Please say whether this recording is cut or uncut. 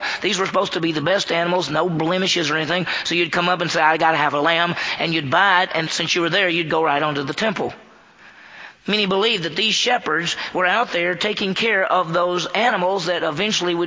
cut